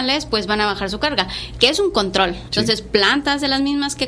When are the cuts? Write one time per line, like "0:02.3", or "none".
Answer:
0:02.5